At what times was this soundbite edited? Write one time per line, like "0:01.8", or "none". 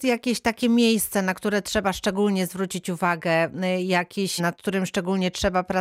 0:04.4